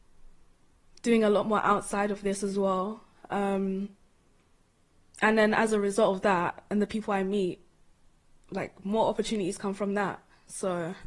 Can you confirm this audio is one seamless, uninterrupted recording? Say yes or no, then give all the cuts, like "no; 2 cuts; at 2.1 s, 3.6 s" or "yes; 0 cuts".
yes; 0 cuts